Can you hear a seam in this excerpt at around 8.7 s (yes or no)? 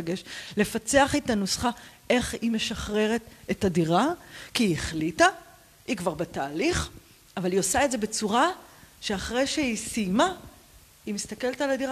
no